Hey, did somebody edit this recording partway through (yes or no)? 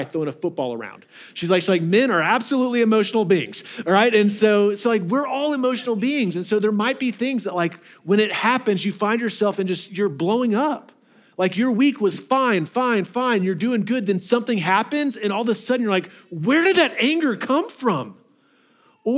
no